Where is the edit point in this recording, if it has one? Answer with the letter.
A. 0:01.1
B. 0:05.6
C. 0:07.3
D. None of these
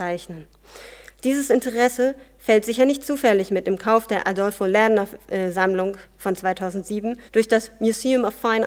C